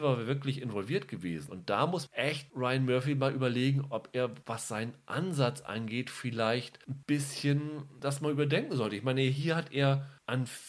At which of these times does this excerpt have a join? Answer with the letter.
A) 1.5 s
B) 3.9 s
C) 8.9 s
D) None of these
A